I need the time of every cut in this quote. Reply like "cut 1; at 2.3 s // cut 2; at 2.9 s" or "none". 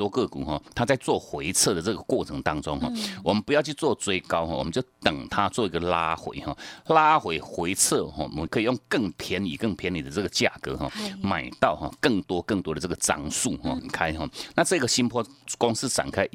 cut 1; at 8.5 s // cut 2; at 13.8 s